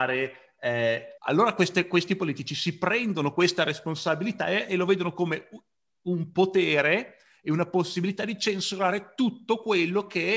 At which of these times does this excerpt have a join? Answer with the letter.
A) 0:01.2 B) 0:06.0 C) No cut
A